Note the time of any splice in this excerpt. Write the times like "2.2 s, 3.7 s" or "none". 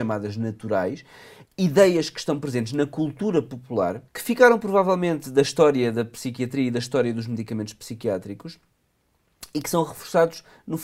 1.4 s, 4.1 s